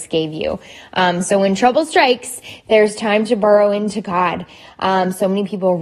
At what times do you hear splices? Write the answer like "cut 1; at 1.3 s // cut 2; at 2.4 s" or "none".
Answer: none